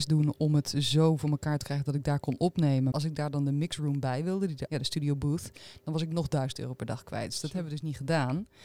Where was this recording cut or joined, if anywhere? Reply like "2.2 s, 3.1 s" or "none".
2.9 s, 4.7 s